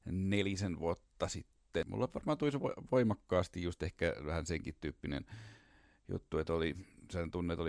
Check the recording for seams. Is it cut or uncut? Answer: uncut